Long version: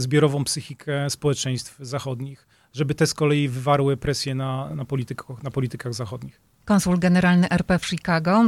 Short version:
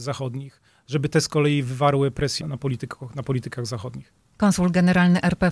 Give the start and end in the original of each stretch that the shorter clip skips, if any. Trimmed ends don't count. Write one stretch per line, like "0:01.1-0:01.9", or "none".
0:04.3-0:04.7